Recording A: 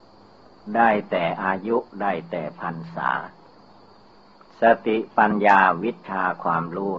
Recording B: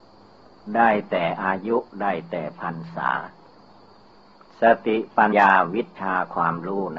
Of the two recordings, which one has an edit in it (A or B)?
B